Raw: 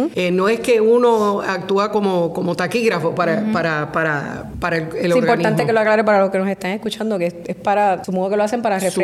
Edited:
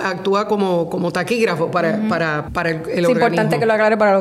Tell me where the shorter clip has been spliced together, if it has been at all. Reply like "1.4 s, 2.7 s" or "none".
2.5 s